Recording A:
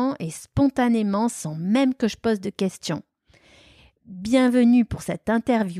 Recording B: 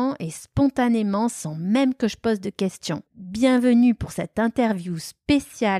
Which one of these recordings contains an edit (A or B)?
B